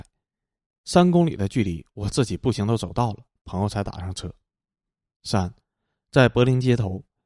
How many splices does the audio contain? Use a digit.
0